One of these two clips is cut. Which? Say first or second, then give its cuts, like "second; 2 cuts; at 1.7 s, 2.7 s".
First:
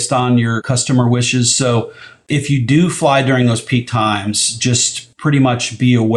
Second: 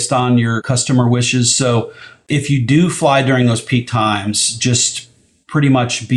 first; 1 cut; at 5.1 s